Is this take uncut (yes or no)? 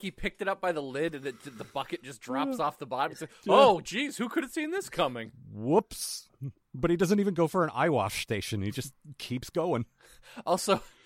yes